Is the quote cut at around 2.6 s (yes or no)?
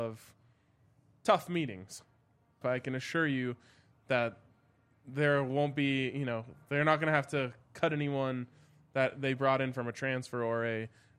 yes